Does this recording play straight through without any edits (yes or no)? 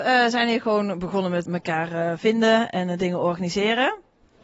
no